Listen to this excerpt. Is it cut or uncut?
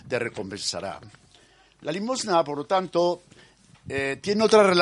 uncut